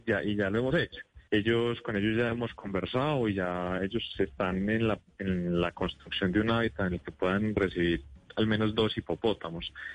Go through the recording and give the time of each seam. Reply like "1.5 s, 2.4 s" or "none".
1.3 s